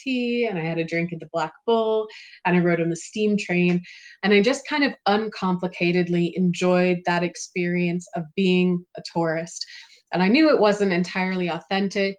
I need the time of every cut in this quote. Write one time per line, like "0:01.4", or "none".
none